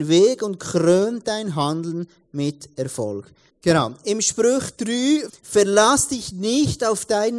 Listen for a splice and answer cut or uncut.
cut